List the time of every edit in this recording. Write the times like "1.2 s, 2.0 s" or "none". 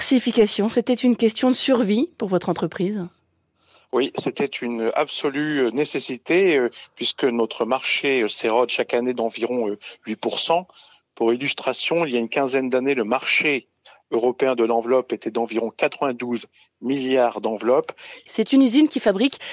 18.3 s